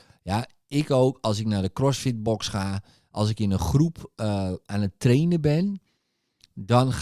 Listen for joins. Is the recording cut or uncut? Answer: uncut